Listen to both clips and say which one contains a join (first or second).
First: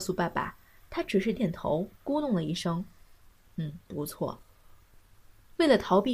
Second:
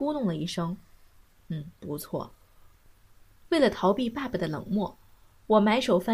first